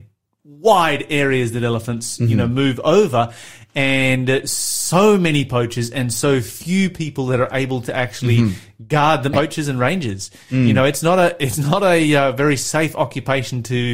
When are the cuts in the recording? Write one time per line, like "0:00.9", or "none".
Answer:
0:09.3